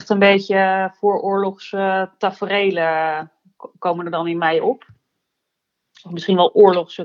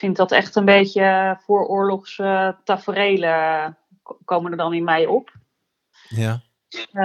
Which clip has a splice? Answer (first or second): second